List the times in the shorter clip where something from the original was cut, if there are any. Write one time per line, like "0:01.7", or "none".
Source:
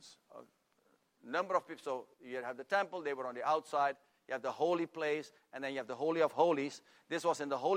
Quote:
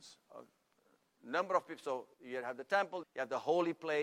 0:03.0